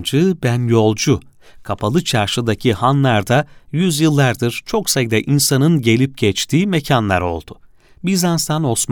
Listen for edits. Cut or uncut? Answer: uncut